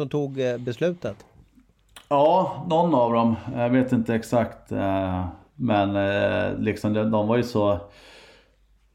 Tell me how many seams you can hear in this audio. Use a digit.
0